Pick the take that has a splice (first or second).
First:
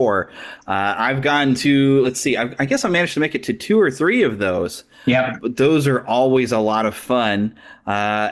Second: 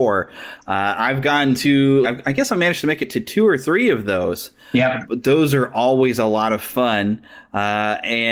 second